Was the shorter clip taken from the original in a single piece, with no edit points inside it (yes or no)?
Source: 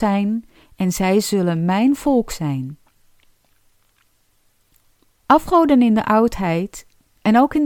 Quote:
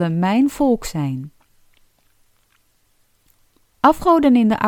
yes